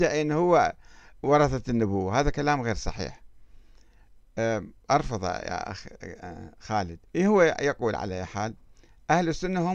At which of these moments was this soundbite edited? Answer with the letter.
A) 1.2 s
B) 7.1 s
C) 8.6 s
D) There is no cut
B